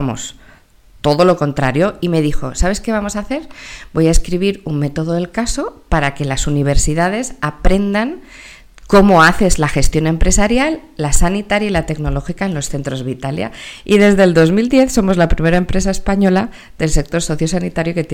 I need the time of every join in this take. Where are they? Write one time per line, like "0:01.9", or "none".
none